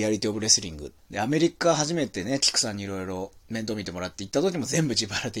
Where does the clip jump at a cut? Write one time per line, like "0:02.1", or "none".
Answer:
0:01.0
0:03.4